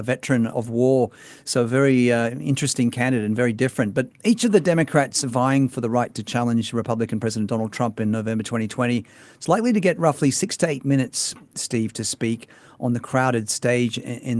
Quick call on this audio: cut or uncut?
uncut